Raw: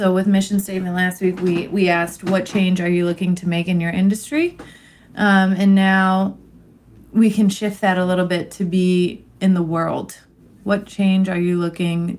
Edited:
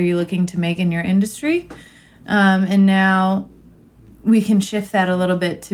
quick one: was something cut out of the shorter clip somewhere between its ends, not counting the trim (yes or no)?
no